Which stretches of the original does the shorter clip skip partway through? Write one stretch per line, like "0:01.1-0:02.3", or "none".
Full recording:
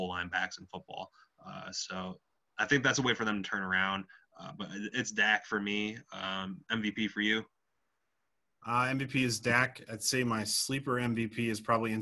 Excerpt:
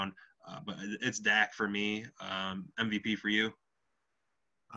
none